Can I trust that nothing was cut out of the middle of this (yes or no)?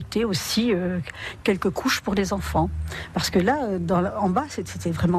yes